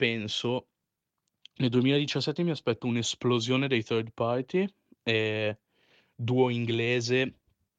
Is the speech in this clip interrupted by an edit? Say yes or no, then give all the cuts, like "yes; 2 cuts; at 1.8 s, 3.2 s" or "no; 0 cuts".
no; 0 cuts